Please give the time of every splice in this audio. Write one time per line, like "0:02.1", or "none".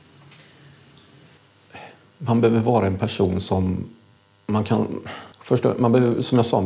0:05.3